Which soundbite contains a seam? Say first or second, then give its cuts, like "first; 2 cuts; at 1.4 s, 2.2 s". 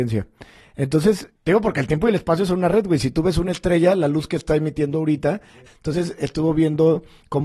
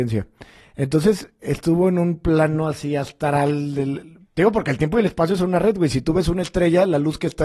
first; 2 cuts; at 1.4 s, 5.7 s